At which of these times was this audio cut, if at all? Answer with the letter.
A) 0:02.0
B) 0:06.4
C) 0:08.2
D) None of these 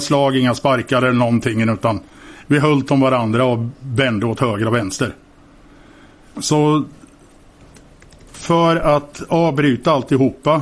B